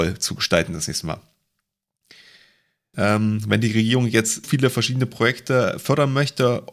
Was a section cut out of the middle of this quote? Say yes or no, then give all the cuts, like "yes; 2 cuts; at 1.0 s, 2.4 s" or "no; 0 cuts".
yes; 2 cuts; at 2.9 s, 4.4 s